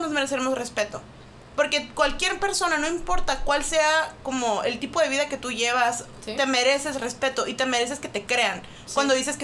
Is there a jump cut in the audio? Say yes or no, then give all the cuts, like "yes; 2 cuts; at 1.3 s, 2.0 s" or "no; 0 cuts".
no; 0 cuts